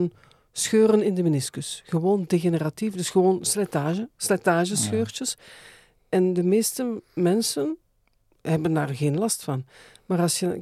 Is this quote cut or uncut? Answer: uncut